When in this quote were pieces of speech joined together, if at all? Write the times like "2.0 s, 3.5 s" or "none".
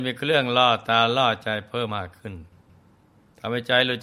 1.9 s